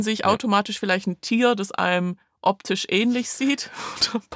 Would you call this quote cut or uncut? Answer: uncut